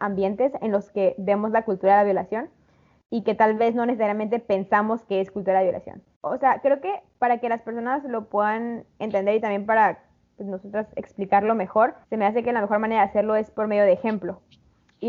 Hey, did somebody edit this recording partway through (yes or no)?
yes